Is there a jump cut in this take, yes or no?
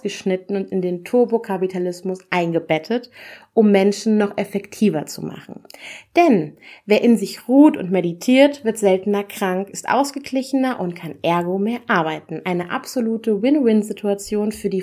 no